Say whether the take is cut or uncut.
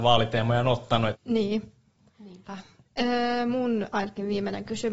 cut